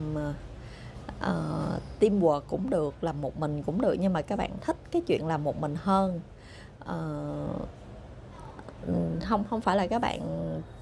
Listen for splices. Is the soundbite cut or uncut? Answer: uncut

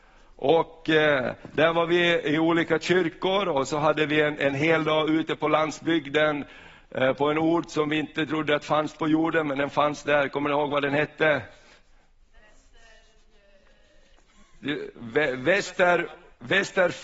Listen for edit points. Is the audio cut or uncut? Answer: uncut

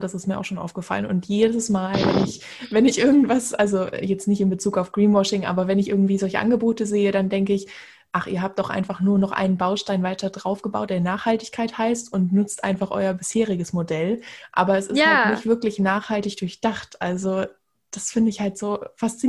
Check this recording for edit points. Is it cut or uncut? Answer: uncut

